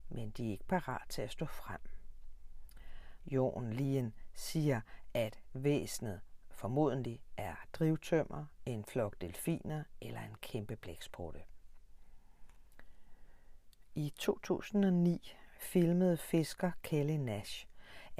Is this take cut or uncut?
cut